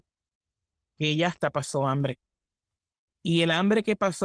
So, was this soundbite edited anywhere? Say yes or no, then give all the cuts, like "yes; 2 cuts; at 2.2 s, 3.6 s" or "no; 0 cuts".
no; 0 cuts